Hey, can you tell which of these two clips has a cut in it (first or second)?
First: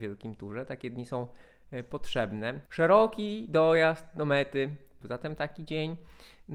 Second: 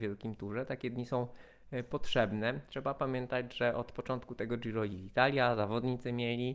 first